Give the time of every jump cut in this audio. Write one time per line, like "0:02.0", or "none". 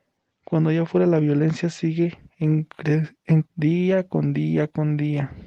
0:03.4